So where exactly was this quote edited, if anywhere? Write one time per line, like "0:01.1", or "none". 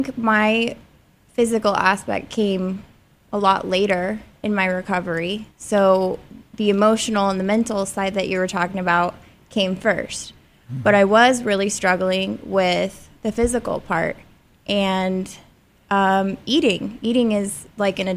0:05.5